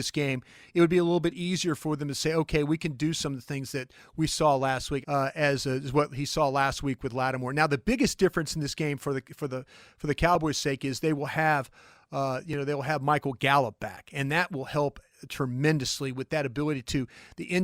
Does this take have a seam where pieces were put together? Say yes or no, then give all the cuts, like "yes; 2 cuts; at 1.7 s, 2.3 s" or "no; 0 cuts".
yes; 1 cut; at 5.0 s